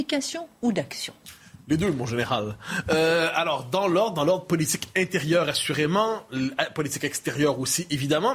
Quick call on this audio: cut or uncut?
uncut